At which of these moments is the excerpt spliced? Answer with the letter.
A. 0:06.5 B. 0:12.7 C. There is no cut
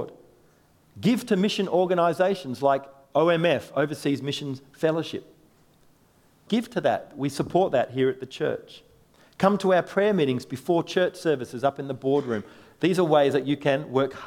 A